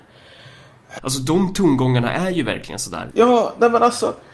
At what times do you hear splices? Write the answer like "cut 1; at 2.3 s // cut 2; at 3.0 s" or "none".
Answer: cut 1; at 1.0 s // cut 2; at 3.1 s

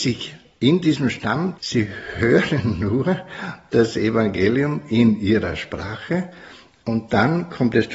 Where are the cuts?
cut 1; at 1.6 s

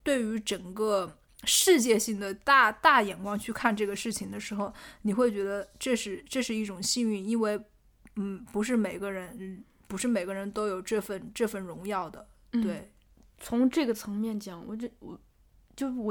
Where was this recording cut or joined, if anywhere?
none

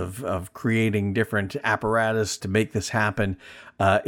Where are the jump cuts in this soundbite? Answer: cut 1; at 2.4 s

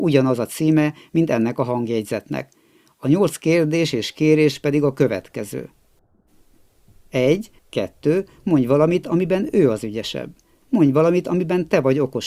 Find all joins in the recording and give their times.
cut 1; at 7.6 s // cut 2; at 10.6 s

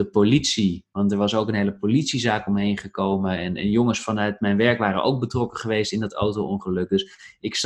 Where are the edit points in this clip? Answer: none

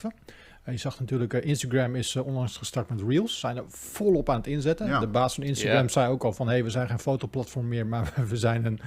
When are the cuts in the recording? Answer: none

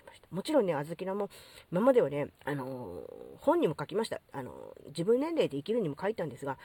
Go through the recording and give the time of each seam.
cut 1; at 2.3 s

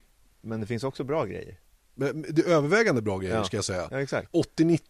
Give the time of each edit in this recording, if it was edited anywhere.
none

